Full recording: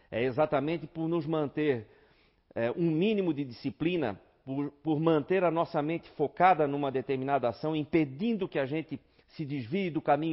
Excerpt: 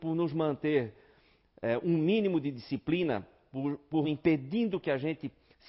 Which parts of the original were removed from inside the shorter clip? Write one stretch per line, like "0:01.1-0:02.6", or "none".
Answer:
0:05.0-0:07.7